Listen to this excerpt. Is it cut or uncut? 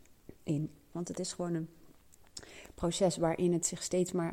cut